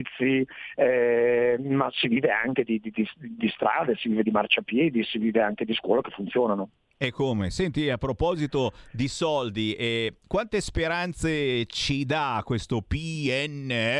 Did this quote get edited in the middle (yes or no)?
no